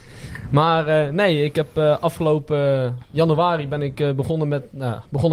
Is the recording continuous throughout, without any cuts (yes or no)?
yes